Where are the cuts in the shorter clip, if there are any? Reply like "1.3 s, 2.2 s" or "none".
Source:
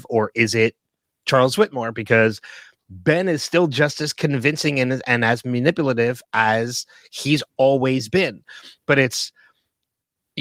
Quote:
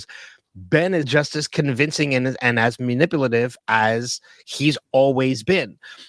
1.0 s